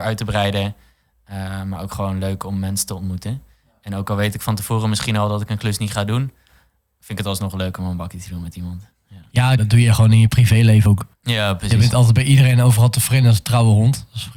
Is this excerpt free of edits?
no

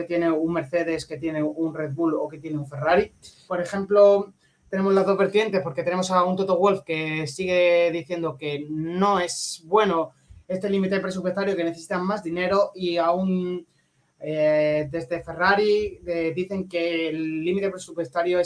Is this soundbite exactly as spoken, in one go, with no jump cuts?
no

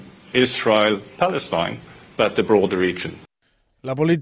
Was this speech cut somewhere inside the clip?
no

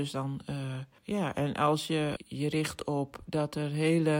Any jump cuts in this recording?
yes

